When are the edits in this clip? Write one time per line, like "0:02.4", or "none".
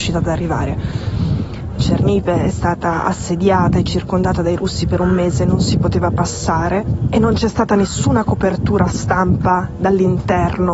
0:01.8